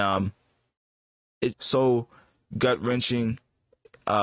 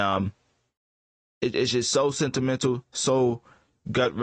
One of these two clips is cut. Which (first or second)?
first